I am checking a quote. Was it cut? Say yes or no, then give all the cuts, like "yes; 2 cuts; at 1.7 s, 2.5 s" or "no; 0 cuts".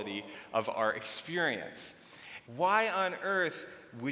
yes; 1 cut; at 2.4 s